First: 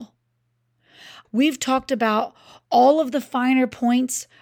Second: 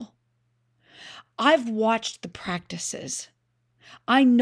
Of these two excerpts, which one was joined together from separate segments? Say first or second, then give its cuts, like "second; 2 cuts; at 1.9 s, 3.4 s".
first; 1 cut; at 1.2 s